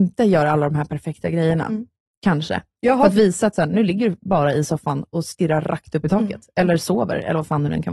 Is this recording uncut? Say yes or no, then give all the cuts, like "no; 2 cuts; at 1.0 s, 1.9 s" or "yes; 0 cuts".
yes; 0 cuts